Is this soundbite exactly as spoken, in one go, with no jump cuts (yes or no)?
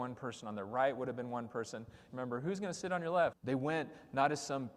no